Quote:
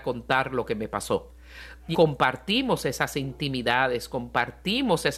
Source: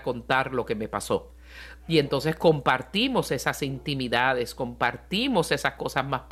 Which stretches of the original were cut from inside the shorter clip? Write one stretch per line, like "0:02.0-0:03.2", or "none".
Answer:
0:01.9-0:02.4